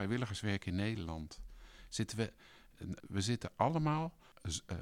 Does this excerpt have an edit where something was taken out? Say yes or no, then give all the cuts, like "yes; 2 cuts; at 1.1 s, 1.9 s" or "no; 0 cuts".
yes; 1 cut; at 3.0 s